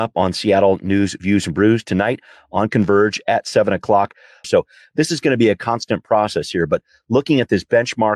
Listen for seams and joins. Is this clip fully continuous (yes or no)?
no